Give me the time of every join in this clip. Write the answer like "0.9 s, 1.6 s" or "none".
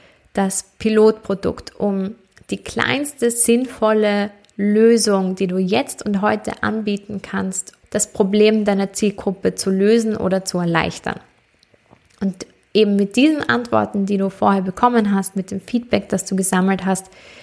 7.8 s